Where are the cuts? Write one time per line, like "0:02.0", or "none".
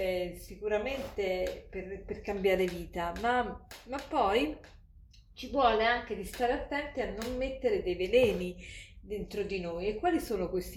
none